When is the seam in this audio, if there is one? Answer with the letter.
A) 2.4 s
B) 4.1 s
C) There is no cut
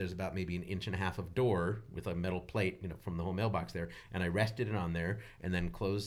C